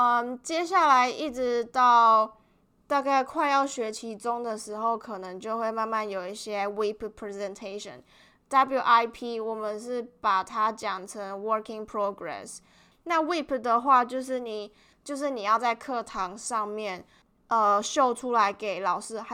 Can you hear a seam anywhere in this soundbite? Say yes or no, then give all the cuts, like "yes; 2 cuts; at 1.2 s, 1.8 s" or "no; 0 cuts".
no; 0 cuts